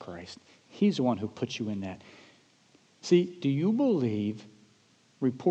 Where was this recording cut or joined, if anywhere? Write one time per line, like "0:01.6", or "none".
none